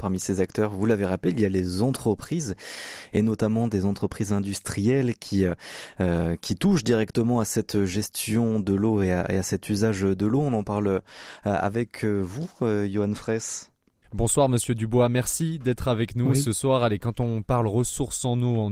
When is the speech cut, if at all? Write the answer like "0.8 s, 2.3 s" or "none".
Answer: none